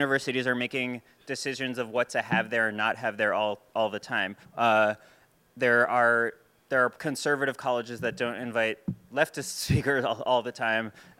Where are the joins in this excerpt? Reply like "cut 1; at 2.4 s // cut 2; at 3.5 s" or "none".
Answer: cut 1; at 4.4 s // cut 2; at 7.0 s